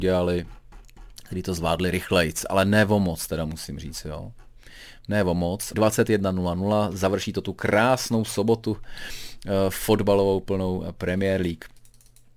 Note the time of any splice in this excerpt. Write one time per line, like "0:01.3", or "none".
0:05.7